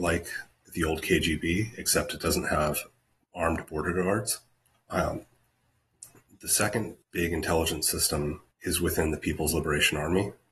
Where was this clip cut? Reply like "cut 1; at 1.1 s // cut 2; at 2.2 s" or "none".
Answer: cut 1; at 4.7 s // cut 2; at 7.0 s // cut 3; at 8.5 s